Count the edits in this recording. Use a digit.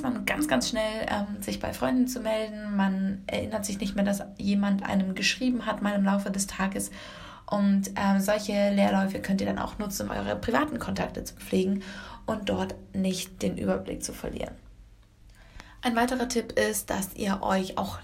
1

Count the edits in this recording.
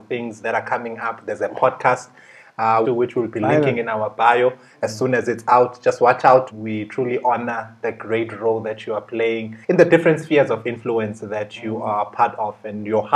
3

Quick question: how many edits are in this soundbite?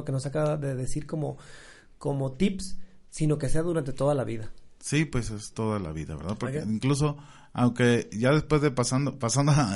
0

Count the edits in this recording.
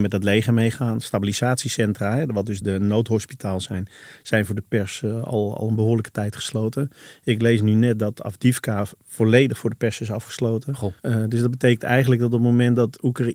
2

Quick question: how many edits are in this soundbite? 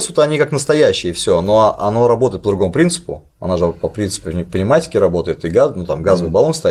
0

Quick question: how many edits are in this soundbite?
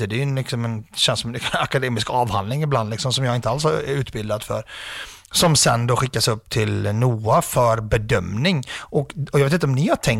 0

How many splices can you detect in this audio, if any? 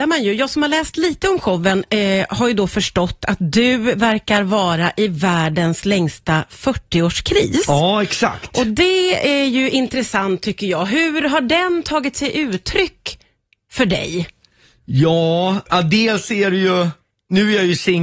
1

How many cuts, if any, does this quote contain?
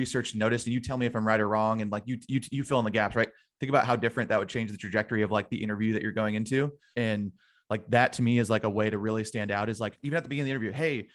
2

